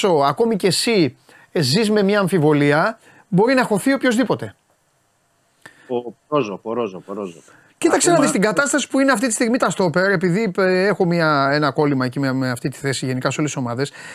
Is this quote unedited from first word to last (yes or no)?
no